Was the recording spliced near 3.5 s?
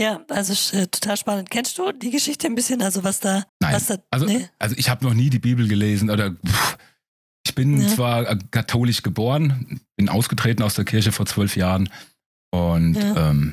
yes; 1 cut; at 3.5 s

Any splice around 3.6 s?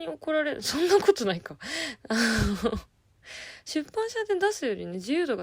no; 0 cuts

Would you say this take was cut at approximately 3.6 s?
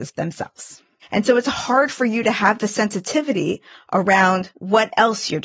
no; 1 cut; at 1.0 s

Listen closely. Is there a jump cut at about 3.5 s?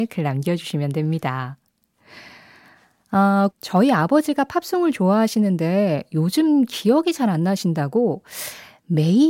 yes; 1 cut; at 3.5 s

